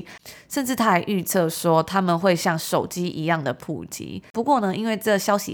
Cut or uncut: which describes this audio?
cut